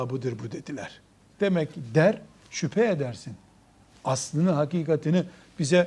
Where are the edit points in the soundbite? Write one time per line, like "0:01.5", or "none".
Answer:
0:01.3